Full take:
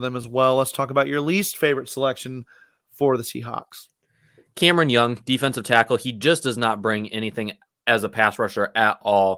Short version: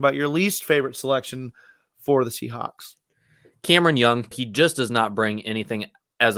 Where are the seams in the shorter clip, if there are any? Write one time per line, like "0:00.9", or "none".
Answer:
0:04.3